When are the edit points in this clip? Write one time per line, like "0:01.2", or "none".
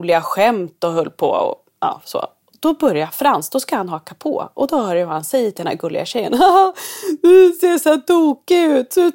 none